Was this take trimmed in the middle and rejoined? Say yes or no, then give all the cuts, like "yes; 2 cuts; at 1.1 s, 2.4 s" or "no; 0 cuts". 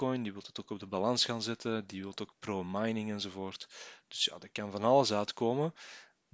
no; 0 cuts